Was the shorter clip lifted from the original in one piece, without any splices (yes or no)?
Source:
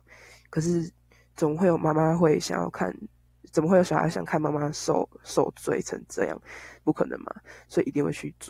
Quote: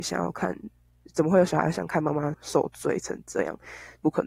no